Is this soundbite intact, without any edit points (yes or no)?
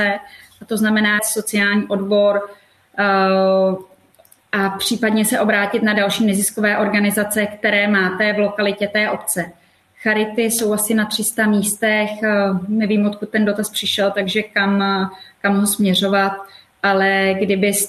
no